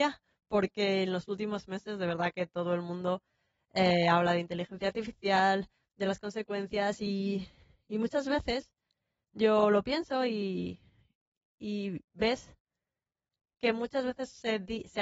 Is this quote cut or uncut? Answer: uncut